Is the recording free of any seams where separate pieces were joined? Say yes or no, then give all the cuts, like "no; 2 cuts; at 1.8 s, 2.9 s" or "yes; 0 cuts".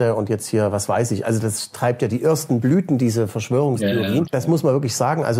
no; 1 cut; at 4.3 s